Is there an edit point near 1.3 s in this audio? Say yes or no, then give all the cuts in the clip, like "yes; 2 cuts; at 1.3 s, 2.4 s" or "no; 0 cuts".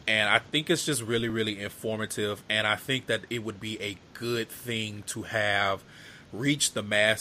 no; 0 cuts